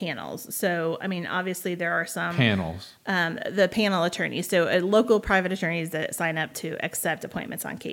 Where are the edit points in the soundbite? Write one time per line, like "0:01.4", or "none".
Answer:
none